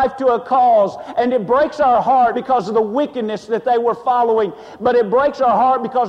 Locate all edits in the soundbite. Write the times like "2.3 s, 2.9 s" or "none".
2.3 s